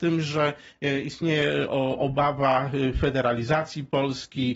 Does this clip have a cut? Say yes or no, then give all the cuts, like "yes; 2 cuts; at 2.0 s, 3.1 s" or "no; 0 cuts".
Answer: no; 0 cuts